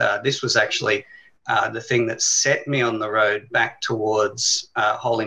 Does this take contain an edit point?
no; 0 cuts

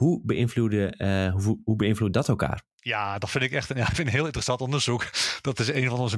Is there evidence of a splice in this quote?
yes; 1 cut; at 2.7 s

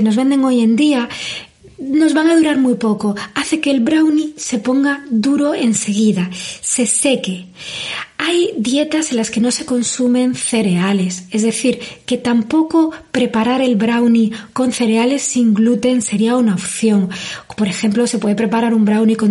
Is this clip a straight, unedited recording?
yes; 0 cuts

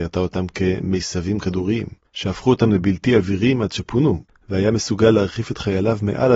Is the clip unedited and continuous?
no; 2 cuts; at 2.1 s, 4.3 s

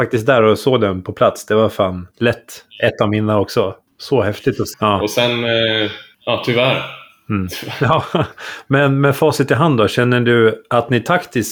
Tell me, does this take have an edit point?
yes; 1 cut; at 4.7 s

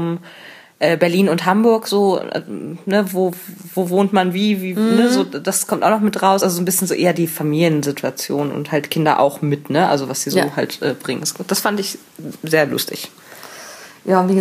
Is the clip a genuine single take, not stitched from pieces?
yes; 0 cuts

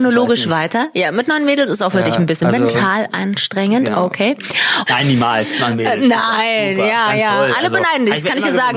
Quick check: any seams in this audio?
yes; 1 cut; at 4.9 s

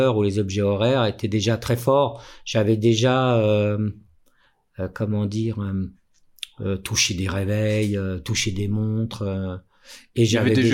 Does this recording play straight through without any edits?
yes; 0 cuts

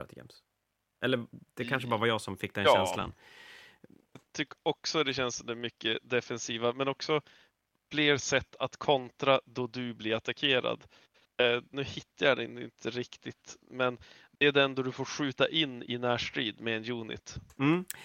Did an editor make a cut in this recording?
yes; 1 cut; at 11.7 s

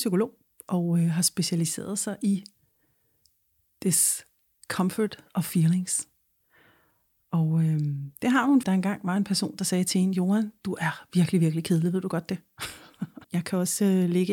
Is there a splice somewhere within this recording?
yes; 2 cuts; at 8.6 s, 13.2 s

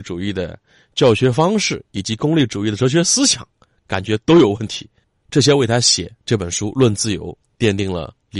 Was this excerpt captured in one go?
yes; 0 cuts

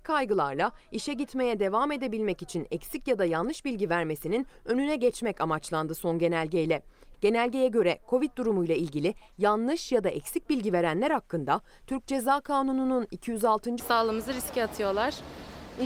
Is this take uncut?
no; 2 cuts; at 7.1 s, 13.8 s

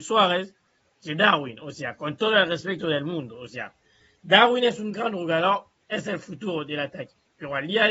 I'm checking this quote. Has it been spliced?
no; 0 cuts

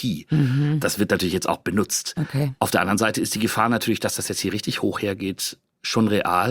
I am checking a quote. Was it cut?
no; 0 cuts

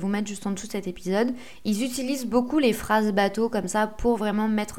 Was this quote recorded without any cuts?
yes; 0 cuts

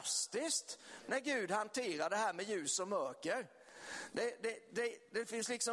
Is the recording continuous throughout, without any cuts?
yes; 0 cuts

